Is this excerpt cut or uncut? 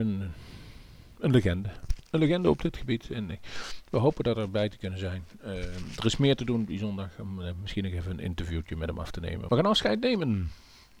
cut